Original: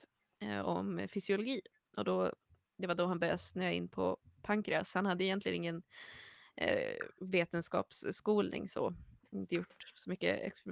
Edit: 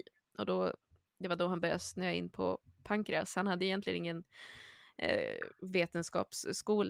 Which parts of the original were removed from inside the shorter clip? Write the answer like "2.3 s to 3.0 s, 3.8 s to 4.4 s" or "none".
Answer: none